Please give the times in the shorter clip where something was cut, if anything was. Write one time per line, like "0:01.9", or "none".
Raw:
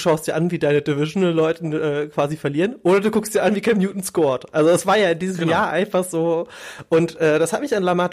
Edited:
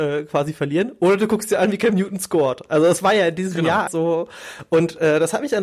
0:03.9